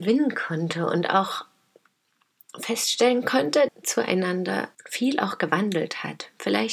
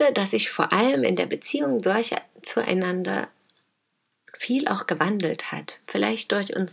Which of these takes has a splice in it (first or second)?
first